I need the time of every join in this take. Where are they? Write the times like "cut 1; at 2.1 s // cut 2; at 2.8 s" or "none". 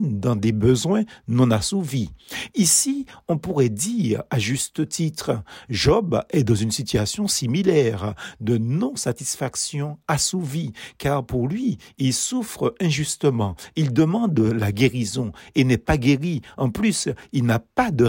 none